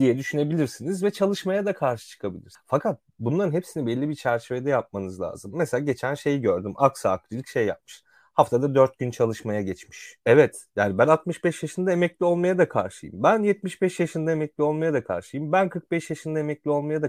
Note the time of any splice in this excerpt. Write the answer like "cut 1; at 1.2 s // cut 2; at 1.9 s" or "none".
cut 1; at 10.2 s